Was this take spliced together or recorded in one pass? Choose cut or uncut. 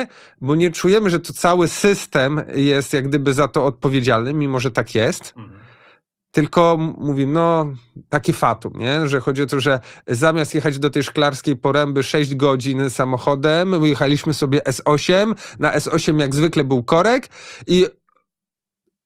uncut